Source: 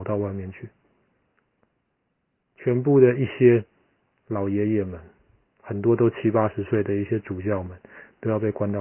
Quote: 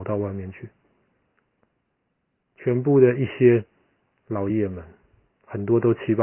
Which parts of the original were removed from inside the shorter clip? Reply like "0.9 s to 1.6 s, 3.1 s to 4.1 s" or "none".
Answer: 4.5 s to 4.7 s

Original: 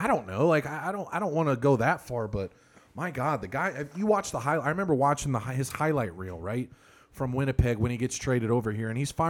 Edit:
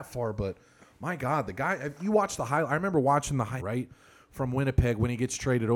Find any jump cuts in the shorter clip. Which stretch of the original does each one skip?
5.5 s to 6.4 s

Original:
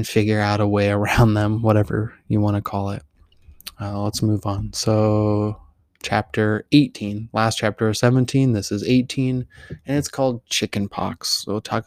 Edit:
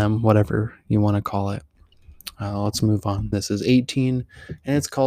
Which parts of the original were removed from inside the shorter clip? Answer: 4.7 s to 8.5 s

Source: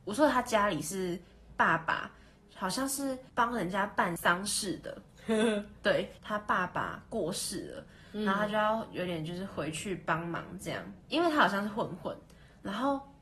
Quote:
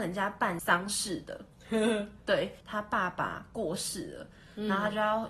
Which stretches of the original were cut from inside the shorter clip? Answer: none

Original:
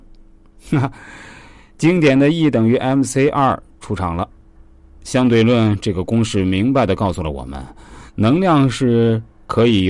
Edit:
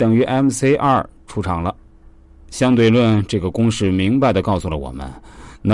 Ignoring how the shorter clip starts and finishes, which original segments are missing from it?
none

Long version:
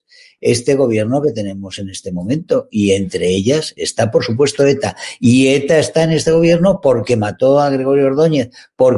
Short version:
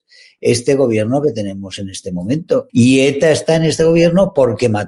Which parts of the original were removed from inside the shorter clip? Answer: 2.7 s to 5.2 s

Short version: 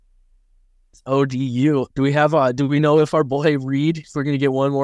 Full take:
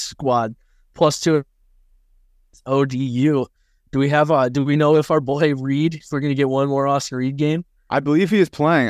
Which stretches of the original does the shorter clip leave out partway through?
3.5 s to 3.9 s

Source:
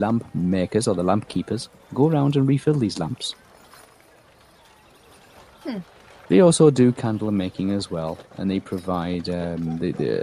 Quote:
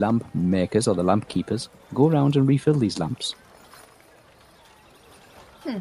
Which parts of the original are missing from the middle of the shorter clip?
none

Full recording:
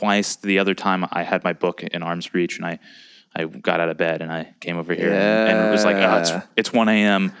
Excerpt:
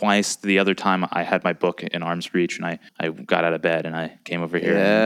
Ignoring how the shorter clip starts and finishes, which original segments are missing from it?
2.9 s to 3.2 s

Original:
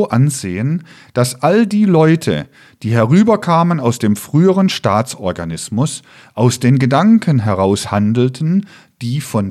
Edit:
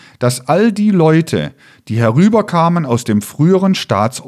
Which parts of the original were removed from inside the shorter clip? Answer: none

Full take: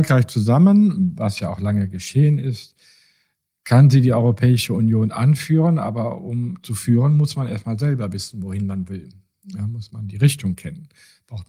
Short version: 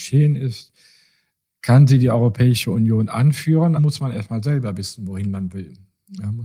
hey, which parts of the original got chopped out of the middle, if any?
5.8 s to 7.1 s

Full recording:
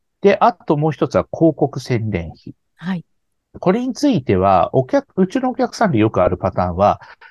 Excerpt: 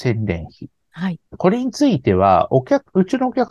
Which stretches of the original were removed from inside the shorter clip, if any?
3.1 s to 3.5 s

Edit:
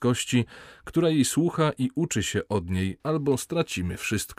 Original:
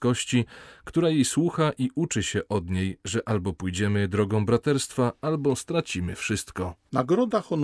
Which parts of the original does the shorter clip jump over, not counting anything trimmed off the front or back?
3.0 s to 5.2 s

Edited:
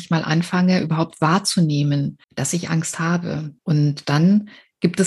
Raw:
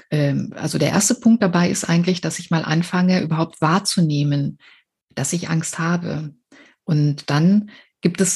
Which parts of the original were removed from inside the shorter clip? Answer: 4.6 s to 5.0 s, 6.4 s to 6.8 s

